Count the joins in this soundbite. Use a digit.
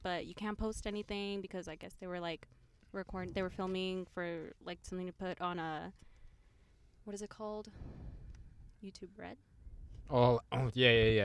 0